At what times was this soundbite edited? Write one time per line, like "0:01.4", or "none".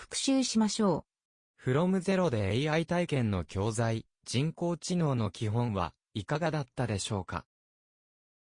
0:01.5